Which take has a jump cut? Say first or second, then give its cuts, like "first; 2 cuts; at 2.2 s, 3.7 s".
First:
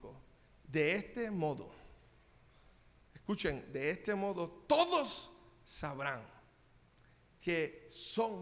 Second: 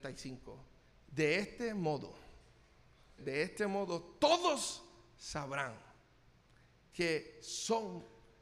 second; 1 cut; at 3.2 s